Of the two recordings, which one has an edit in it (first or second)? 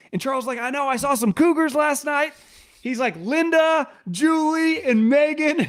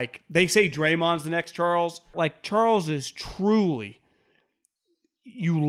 second